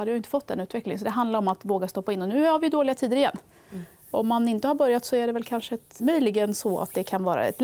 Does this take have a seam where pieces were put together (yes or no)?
yes